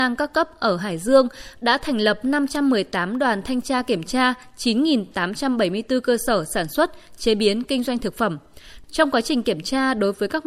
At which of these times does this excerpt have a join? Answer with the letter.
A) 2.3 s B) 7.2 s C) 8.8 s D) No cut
C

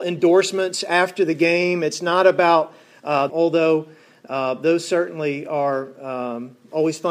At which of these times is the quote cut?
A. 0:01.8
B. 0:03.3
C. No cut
B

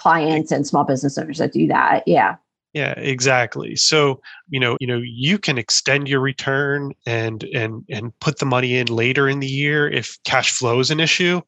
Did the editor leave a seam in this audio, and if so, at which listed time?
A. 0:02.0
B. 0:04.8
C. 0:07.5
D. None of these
B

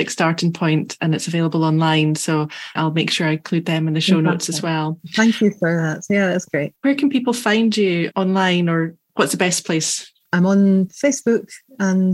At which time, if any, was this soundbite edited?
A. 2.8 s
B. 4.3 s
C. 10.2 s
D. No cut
A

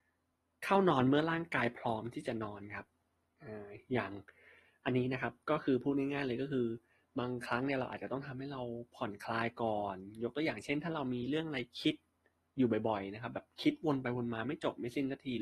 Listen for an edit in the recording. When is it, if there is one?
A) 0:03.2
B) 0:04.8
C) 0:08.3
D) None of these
D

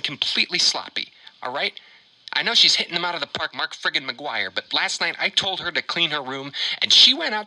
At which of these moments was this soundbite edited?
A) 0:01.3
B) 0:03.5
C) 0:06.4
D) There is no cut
B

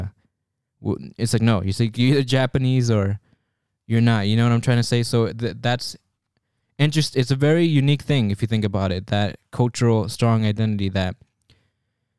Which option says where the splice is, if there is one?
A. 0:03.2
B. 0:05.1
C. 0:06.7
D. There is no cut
D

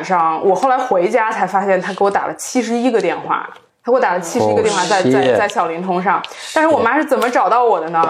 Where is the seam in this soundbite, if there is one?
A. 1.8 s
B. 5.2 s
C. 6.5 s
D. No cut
D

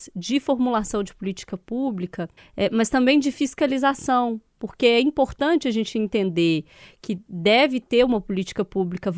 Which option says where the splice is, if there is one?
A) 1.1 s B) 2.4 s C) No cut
B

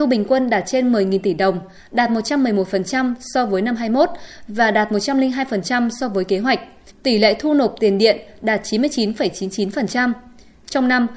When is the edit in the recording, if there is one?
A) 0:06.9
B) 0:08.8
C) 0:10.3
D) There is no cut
A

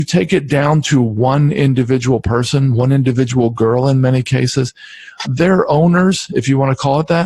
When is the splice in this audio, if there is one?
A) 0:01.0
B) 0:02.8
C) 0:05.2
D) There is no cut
C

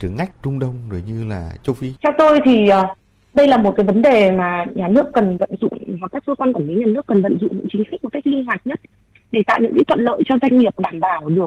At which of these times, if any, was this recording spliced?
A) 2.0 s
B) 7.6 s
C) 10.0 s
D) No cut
A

